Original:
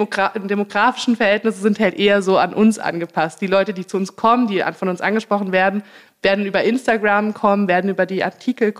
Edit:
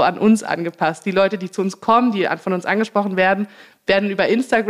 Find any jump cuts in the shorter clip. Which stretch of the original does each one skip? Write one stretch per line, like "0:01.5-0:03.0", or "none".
none